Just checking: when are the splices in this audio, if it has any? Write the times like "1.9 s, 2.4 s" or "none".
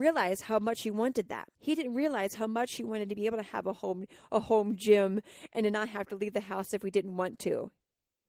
1.5 s